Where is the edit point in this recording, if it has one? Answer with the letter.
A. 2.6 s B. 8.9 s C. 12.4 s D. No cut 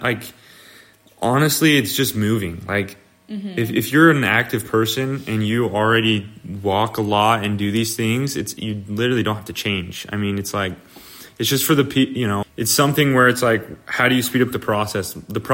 C